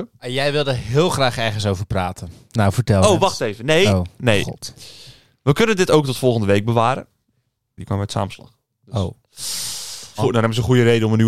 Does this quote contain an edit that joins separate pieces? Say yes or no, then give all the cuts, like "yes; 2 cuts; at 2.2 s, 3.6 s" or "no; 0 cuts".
yes; 2 cuts; at 7.8 s, 10.2 s